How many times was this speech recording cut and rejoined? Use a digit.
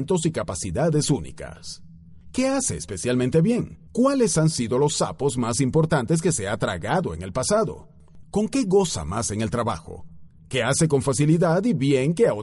3